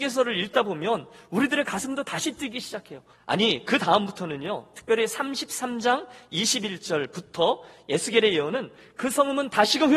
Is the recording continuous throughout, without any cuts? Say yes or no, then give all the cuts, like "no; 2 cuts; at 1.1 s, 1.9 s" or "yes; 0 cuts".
no; 1 cut; at 3.1 s